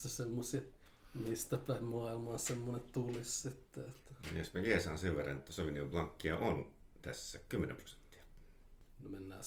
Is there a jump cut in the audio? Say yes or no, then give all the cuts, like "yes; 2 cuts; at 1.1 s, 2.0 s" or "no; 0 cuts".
no; 0 cuts